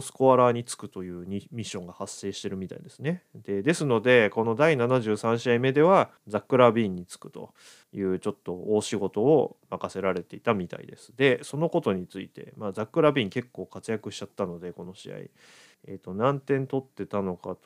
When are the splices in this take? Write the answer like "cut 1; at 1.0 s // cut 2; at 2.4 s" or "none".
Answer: none